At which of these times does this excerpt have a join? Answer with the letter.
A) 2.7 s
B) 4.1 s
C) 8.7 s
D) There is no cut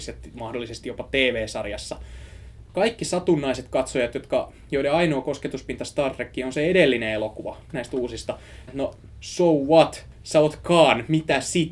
C